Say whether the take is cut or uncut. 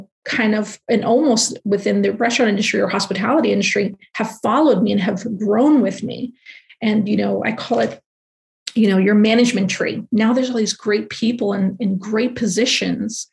uncut